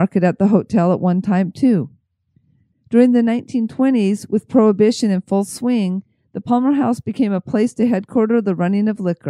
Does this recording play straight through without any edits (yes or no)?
no